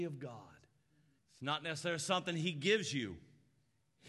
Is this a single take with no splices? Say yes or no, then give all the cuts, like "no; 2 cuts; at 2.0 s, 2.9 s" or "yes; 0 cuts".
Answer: no; 1 cut; at 1.2 s